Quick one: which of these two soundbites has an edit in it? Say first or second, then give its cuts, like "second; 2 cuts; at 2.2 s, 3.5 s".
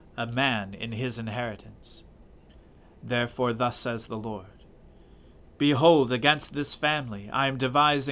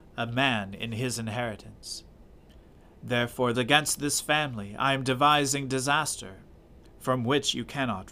second; 1 cut; at 3.5 s